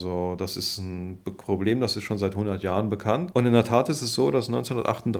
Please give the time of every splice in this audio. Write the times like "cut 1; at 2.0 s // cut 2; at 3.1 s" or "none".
cut 1; at 3.3 s